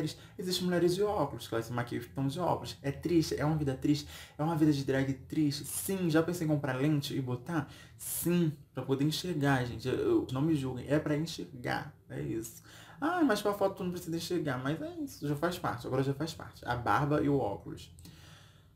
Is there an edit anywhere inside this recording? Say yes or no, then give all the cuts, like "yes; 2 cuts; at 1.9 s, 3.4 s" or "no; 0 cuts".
yes; 1 cut; at 10.3 s